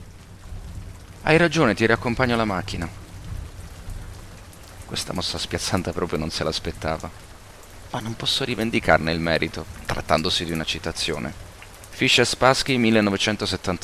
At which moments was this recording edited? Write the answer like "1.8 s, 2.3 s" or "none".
none